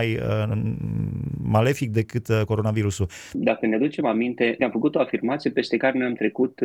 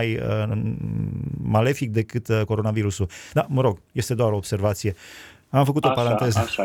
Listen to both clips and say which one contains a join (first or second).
first